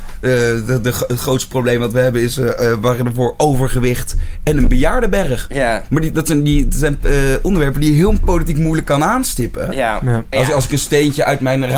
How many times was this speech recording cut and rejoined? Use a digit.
1